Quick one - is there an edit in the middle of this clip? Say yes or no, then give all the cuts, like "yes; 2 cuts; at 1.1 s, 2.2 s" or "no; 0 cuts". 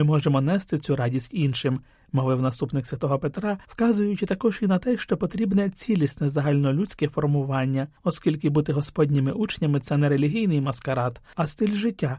no; 0 cuts